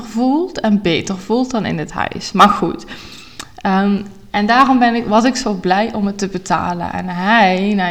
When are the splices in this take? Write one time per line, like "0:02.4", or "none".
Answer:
none